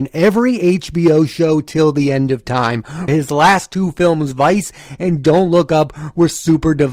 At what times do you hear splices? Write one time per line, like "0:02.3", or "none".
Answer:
0:03.1